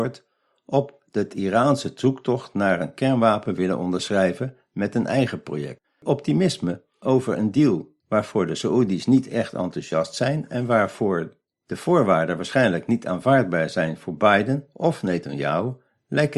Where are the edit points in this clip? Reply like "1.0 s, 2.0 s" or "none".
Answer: 5.8 s, 8.0 s